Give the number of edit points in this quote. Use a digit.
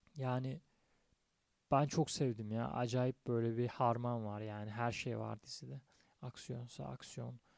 0